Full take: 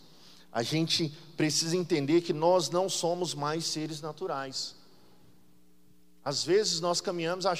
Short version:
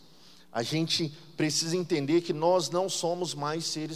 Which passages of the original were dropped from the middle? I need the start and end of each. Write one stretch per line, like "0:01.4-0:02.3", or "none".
none